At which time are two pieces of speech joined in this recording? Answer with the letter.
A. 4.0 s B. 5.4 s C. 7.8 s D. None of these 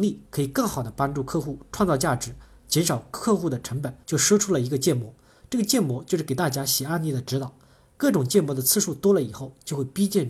A